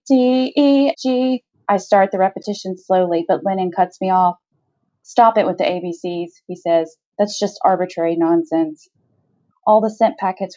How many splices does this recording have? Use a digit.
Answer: 2